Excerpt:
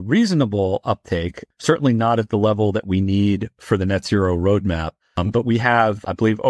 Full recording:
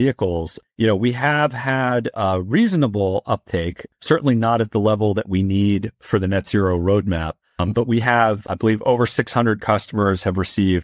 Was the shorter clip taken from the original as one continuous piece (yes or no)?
yes